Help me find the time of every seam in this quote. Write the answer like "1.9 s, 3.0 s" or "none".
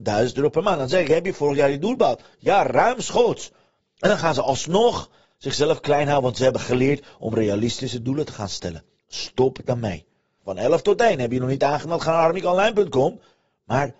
10.4 s